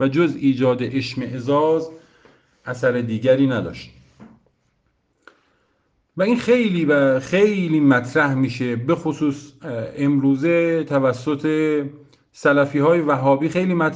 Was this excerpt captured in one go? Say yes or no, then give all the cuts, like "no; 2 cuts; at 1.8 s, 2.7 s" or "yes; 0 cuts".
yes; 0 cuts